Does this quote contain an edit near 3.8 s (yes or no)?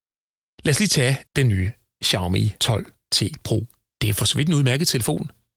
no